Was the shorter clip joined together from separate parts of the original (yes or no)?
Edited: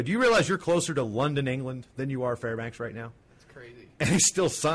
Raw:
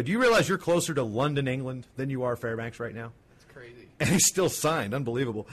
no